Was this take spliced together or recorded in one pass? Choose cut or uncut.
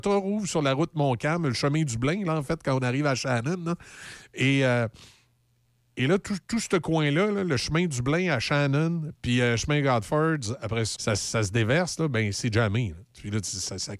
cut